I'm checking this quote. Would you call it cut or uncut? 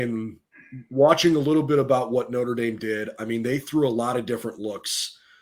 uncut